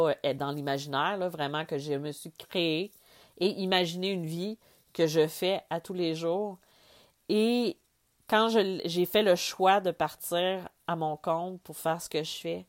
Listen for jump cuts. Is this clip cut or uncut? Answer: uncut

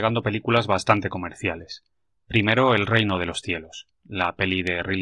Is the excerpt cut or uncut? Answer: uncut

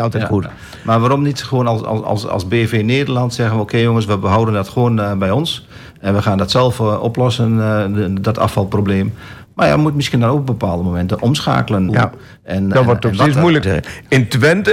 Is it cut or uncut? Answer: cut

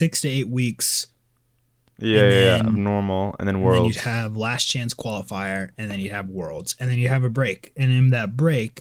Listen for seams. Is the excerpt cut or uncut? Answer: uncut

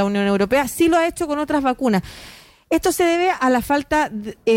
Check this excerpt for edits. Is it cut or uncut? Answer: uncut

